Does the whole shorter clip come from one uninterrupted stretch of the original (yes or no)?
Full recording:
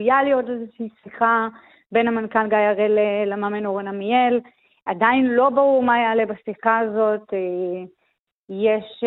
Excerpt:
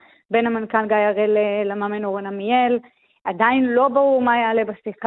yes